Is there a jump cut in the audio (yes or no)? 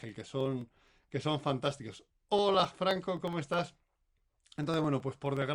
no